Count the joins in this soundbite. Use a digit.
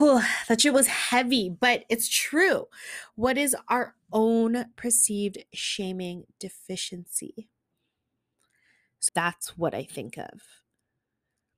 1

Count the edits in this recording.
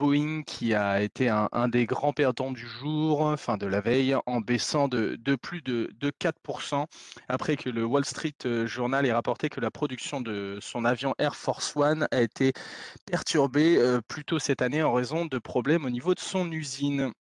0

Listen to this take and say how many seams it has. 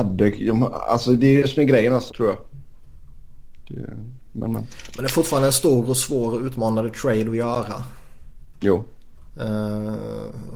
1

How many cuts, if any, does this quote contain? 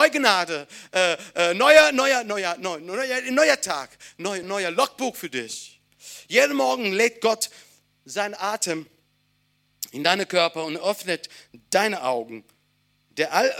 1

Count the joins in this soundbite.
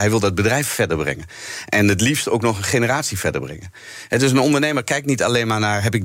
0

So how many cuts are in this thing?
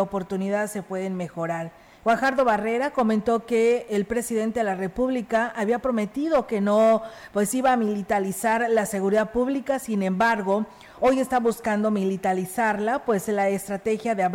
1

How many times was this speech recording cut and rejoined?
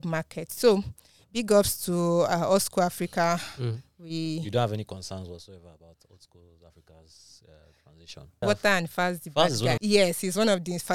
2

